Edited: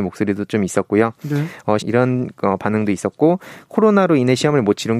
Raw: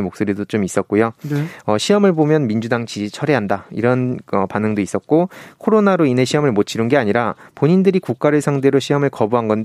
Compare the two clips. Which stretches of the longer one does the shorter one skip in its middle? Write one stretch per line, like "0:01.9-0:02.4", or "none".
0:01.8-0:03.7